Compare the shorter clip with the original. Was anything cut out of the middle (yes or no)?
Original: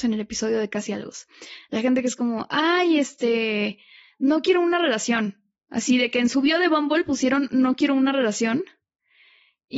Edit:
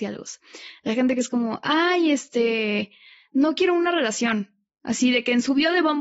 no